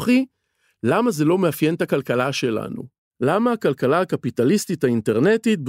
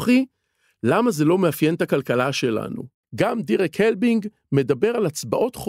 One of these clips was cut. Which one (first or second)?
second